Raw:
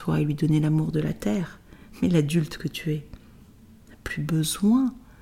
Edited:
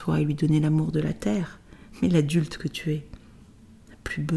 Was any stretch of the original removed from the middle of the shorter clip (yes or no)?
no